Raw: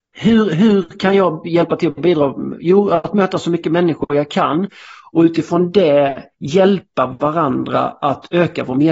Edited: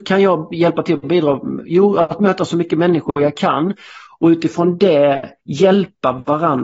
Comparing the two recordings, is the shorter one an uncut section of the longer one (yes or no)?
yes